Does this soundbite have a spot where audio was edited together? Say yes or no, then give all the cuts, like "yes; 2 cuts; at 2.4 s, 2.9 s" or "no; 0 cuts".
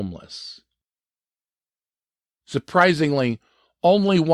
no; 0 cuts